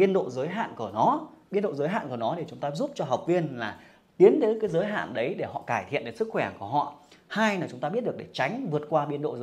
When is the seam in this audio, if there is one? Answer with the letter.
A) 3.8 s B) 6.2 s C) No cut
C